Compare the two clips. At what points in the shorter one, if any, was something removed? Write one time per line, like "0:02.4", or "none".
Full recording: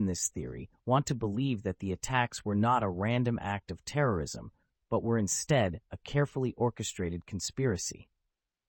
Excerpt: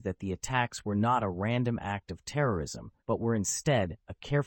0:03.0